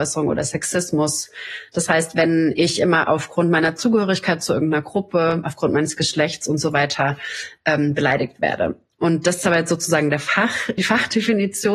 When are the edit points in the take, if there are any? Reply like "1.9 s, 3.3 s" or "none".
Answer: 10.8 s

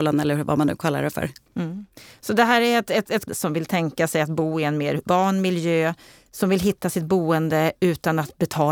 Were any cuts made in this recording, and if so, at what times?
3.3 s, 5.1 s

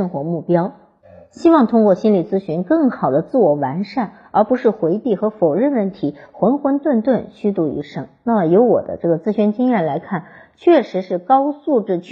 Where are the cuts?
none

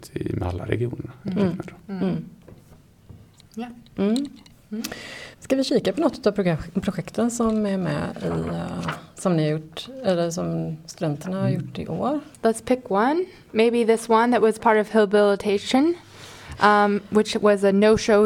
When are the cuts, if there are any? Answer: 5.3 s

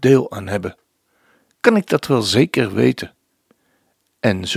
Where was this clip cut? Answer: none

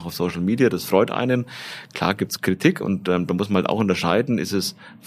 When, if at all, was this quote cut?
none

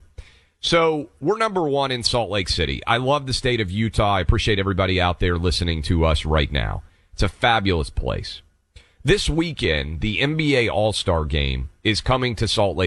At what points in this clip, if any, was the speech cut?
none

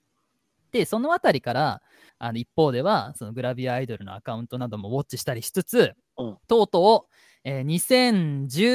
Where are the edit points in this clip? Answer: 2.1 s, 6.4 s

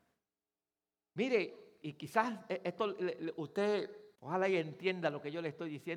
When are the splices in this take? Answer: 1.8 s, 4.1 s

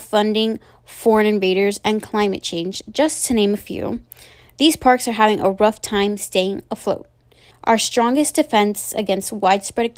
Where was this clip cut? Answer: 7.5 s

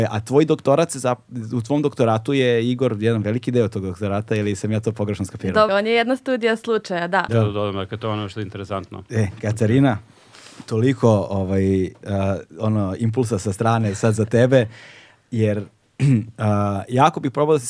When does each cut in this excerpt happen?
5.7 s, 7.3 s

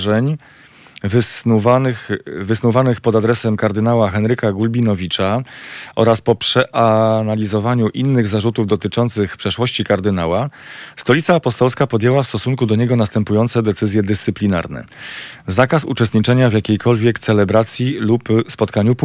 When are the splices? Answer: none

